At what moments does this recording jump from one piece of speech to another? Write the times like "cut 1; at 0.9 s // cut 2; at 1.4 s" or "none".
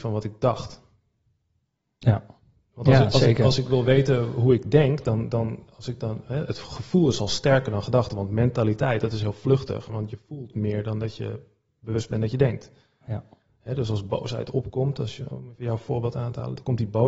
cut 1; at 9.9 s